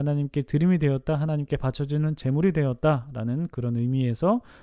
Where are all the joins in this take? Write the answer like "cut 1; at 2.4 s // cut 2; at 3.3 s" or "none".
none